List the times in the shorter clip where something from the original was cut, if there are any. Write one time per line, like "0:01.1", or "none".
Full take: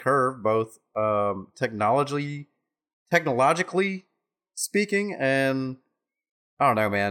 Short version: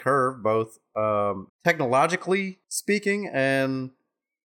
0:01.5
0:02.6